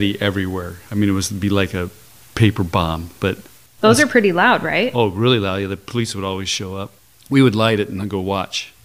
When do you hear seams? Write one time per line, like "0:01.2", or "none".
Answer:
none